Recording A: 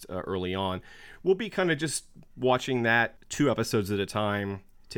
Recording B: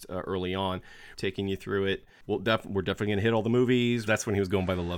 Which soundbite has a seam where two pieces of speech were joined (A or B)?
B